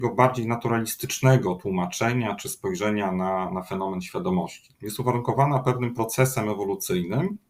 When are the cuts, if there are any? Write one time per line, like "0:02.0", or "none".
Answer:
0:04.7